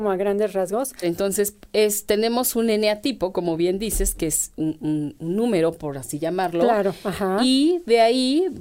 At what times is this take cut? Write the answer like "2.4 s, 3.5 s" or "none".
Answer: 1.0 s